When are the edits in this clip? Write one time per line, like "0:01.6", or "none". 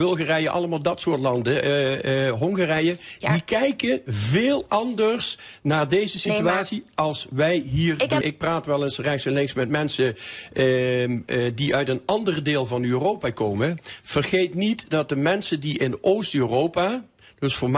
0:08.2